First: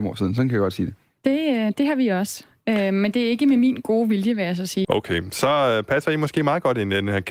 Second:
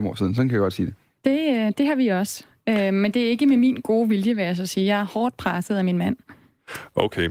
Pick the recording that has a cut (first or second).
first